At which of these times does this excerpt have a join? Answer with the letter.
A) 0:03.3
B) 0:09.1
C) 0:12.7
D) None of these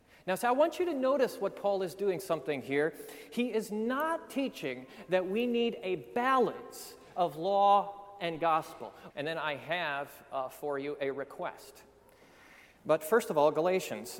B